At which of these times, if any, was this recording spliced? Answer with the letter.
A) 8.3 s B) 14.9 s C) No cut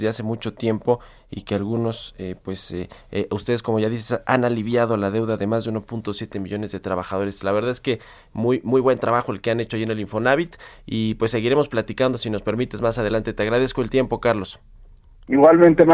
C